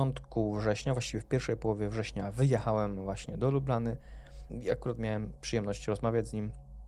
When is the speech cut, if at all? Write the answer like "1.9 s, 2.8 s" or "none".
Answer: 4.5 s